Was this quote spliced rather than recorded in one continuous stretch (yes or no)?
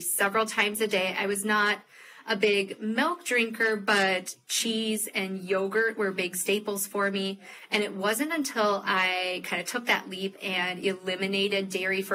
no